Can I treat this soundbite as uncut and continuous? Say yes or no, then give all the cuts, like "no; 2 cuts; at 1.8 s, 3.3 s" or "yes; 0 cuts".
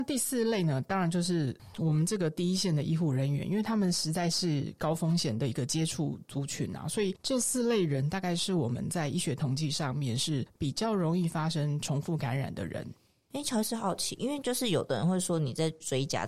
yes; 0 cuts